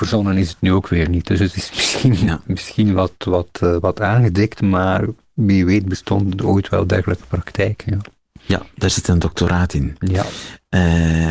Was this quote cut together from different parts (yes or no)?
no